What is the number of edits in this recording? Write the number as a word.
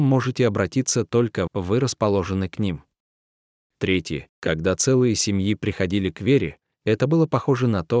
two